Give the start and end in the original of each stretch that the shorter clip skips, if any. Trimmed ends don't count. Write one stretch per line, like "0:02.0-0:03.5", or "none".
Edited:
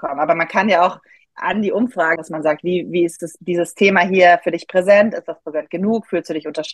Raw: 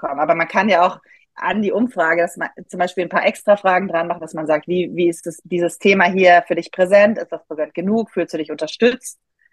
0:02.2-0:04.2